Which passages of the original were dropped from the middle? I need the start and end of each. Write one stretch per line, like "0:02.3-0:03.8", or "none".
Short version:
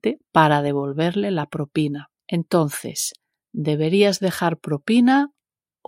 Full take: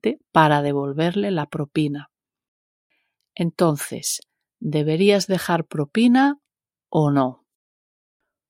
0:02.2-0:03.3